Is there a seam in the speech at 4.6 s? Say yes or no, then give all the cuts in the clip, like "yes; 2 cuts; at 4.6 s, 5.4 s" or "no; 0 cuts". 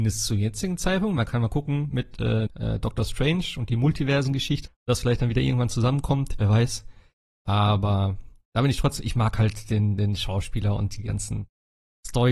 yes; 2 cuts; at 2.5 s, 4.6 s